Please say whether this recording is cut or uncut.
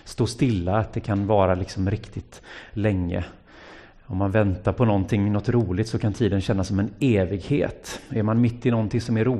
uncut